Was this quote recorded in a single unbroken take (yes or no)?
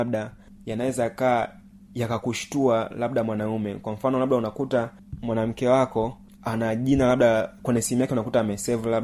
yes